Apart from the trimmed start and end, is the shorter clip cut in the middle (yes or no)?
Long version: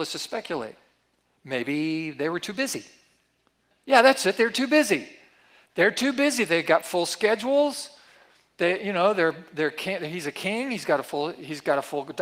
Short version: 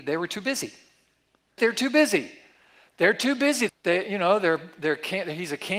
yes